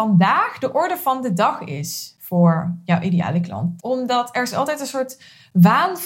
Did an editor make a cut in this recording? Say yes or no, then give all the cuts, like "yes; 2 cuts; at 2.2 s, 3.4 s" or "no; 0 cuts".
yes; 1 cut; at 3.8 s